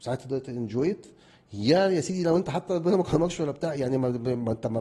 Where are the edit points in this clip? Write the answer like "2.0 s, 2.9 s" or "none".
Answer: none